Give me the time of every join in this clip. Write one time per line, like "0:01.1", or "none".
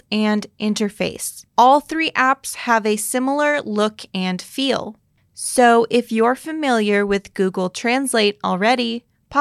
0:01.5